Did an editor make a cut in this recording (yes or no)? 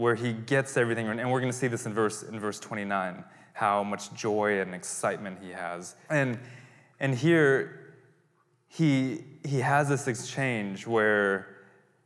yes